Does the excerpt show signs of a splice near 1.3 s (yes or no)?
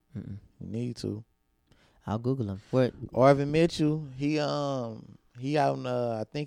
no